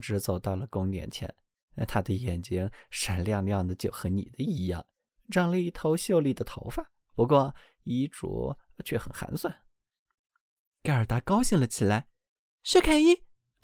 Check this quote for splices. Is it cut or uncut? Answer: uncut